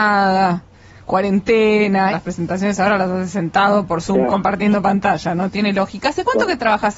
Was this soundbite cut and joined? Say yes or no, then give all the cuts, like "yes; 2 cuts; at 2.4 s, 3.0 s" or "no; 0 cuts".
yes; 1 cut; at 2.1 s